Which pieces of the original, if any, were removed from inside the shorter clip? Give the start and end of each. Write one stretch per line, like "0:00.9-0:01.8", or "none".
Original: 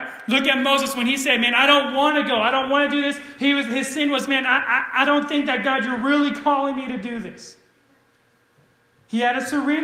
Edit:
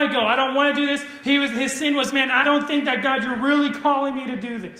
0:04.6-0:05.0

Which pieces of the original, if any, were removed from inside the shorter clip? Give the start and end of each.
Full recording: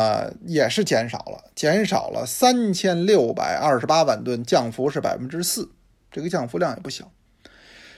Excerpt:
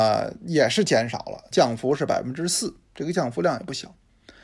0:01.5-0:04.5
0:05.8-0:06.0

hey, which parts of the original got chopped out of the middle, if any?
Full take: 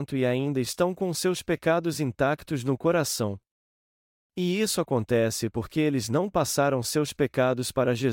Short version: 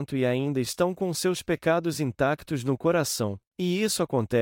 0:03.5-0:04.2

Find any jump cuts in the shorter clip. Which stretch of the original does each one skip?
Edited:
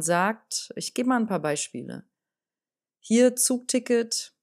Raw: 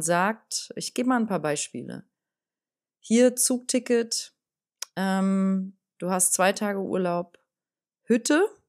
none

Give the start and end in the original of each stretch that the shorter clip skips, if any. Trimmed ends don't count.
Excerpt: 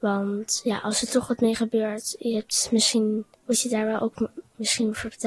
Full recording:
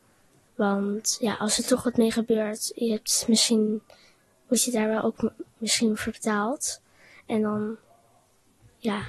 0:03.9-0:04.4

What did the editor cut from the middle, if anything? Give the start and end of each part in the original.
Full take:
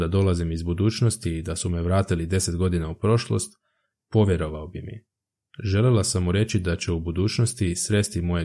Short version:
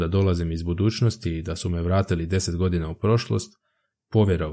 none

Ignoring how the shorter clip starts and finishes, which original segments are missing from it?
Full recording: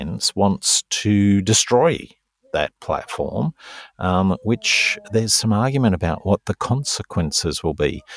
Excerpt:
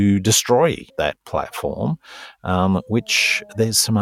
0:02.1-0:02.5

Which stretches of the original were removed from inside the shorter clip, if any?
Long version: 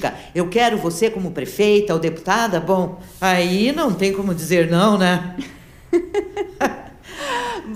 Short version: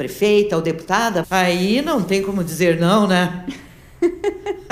0:02.6-0:03.1

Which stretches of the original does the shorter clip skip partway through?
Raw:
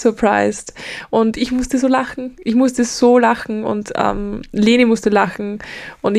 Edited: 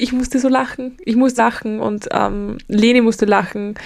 0:02.8-0:03.2

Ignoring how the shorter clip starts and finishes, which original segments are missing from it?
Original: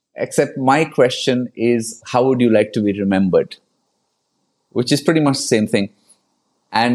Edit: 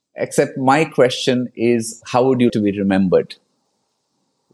0:02.5-0:02.7

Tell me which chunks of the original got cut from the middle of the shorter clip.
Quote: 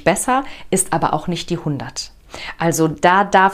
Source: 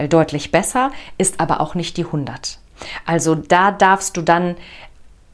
none

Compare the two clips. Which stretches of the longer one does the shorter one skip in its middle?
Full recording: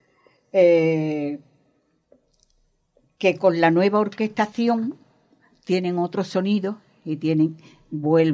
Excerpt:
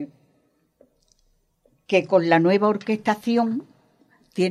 none

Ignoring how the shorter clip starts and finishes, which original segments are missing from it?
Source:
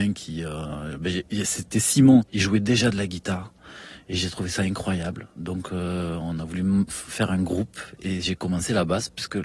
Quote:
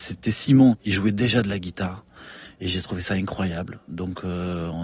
none

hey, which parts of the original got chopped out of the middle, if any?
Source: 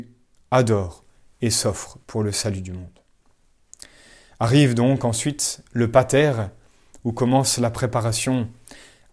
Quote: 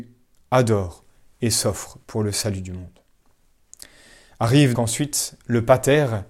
0:04.7-0:05.0

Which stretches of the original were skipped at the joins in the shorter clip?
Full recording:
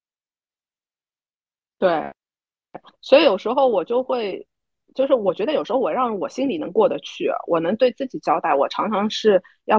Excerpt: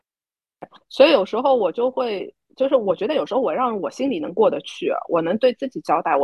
0:04.5-0:04.8

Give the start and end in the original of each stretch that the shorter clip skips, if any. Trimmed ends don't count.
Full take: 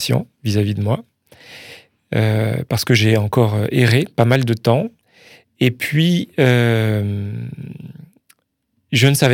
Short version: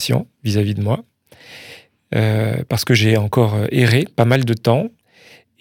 none

